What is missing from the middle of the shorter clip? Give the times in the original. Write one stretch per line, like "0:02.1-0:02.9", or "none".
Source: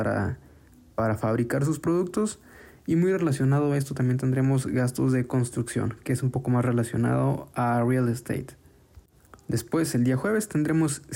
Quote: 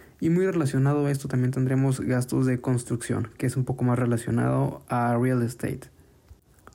none